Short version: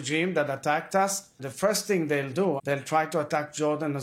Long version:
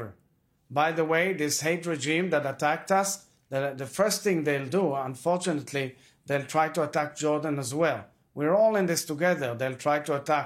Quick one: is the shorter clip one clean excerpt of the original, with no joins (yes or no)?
no